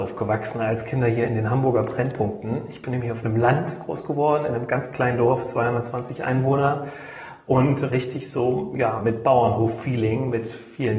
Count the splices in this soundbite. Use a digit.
0